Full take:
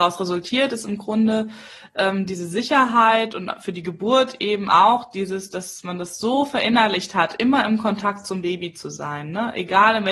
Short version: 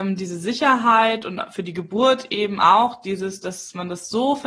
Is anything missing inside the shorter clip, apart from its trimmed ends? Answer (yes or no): no